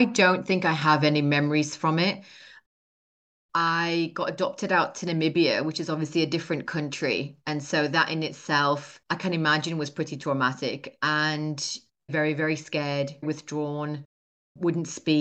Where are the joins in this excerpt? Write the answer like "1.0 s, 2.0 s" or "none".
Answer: 12.1 s, 13.2 s